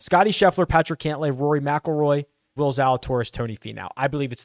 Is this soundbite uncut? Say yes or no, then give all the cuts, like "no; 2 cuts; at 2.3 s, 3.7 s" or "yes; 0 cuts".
no; 1 cut; at 2.6 s